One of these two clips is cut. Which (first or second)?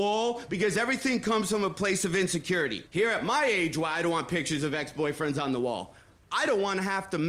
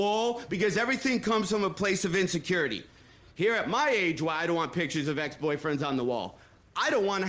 first